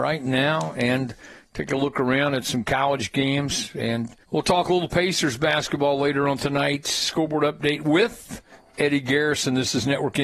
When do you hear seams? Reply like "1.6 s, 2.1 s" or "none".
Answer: 4.2 s

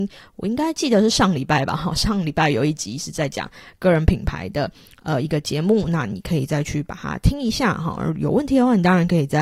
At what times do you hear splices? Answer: none

